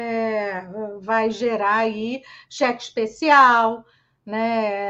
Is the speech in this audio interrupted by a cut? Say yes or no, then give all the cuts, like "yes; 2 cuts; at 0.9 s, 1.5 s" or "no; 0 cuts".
no; 0 cuts